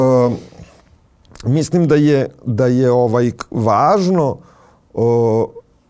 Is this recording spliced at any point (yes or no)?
no